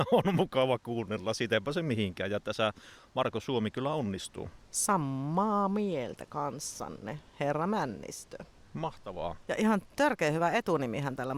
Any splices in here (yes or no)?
no